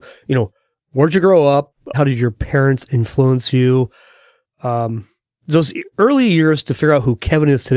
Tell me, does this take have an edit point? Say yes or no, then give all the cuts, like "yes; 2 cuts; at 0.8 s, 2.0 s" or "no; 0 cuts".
yes; 1 cut; at 1.9 s